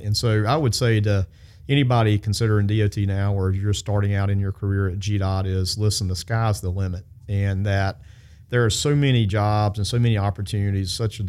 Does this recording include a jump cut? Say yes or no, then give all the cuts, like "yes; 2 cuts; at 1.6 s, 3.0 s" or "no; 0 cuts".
no; 0 cuts